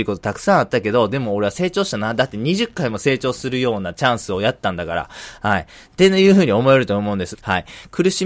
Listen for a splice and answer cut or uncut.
cut